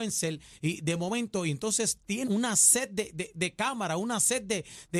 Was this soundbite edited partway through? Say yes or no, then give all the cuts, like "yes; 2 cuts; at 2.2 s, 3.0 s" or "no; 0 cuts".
yes; 2 cuts; at 2.2 s, 3.3 s